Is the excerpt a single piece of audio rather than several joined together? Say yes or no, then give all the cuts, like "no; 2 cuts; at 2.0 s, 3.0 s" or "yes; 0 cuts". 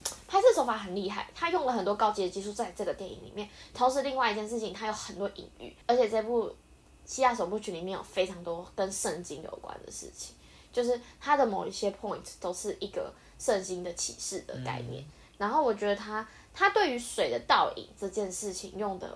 no; 1 cut; at 5.8 s